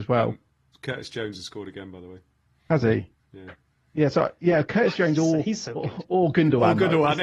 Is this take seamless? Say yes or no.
yes